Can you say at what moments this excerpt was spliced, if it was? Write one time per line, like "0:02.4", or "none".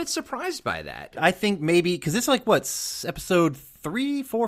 0:01.2